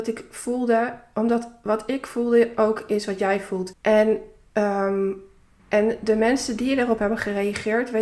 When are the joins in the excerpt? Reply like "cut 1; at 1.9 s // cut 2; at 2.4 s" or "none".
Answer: cut 1; at 3.7 s // cut 2; at 5.6 s